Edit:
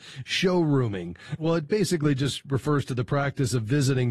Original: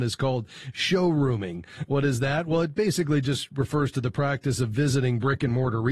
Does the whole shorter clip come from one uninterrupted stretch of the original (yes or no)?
no